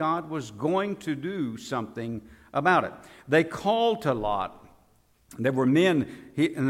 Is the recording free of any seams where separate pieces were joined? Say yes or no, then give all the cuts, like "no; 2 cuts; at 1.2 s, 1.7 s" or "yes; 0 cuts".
yes; 0 cuts